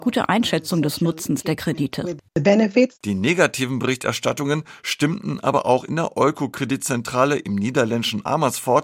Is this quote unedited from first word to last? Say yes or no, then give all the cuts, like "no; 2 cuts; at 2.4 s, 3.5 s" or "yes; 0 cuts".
yes; 0 cuts